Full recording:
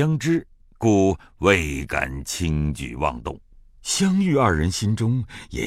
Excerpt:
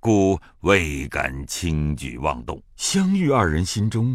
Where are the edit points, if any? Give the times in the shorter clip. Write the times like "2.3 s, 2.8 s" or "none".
2.7 s